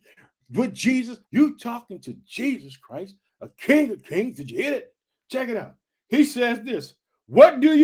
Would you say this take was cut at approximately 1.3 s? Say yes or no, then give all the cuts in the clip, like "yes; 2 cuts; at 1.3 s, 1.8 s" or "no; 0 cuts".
yes; 2 cuts; at 1.3 s, 3.3 s